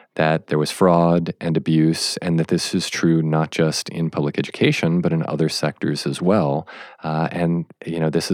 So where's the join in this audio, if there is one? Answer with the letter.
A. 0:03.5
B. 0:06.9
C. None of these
C